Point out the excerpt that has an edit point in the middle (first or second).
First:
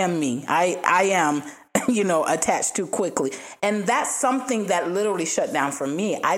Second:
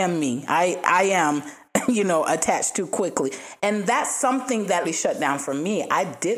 second